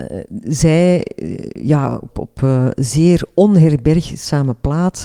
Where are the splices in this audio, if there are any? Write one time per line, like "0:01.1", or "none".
0:02.1